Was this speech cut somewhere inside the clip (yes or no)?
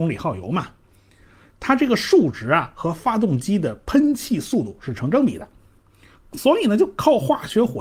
yes